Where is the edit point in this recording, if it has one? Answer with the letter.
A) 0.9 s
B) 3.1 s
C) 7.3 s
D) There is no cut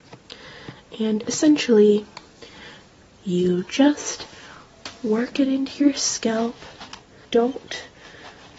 C